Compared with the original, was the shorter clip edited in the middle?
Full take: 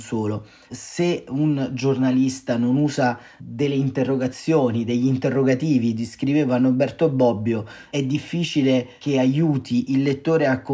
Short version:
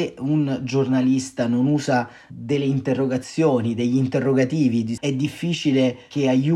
yes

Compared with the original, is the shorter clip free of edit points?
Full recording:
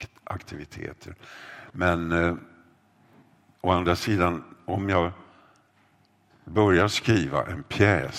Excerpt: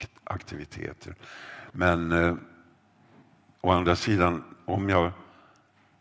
yes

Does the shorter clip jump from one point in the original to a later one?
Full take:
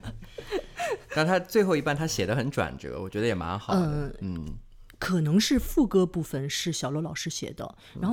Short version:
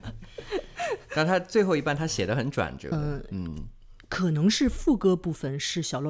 yes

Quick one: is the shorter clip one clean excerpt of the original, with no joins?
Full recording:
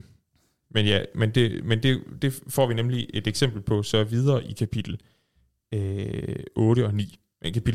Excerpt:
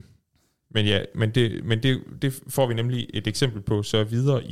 yes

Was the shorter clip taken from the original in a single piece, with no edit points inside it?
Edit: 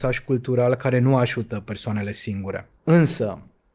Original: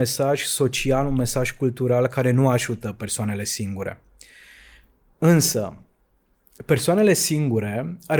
no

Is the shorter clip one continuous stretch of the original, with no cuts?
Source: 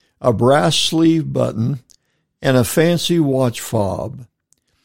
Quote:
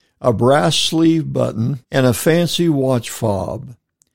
no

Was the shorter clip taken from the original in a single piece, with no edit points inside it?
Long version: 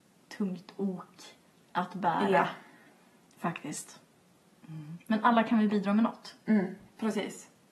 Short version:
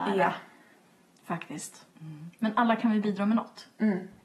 no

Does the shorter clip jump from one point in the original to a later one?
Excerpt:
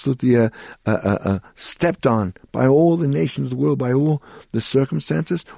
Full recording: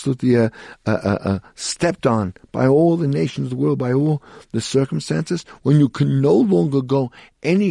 no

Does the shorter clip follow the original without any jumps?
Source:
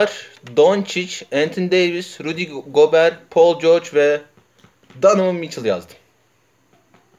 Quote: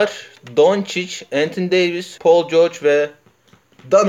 no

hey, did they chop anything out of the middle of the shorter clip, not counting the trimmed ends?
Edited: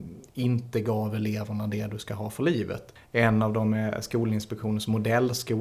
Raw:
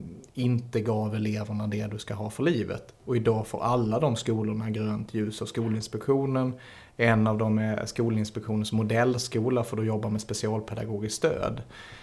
yes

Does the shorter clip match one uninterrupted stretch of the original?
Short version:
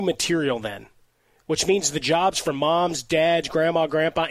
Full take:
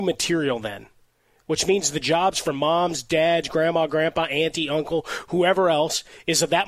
yes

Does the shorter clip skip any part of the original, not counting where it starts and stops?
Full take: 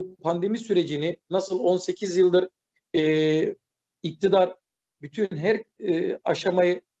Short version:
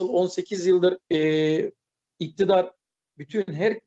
yes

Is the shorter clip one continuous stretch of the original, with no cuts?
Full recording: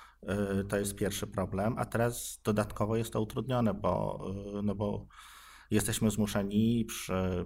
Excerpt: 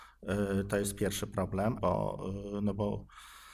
no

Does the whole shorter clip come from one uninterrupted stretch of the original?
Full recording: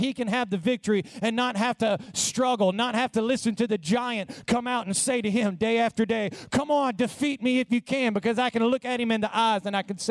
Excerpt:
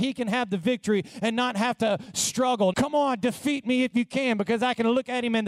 no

